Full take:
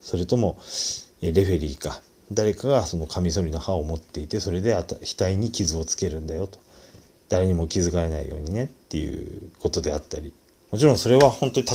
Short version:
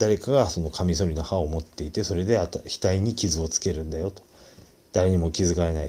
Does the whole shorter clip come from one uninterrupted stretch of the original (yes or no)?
yes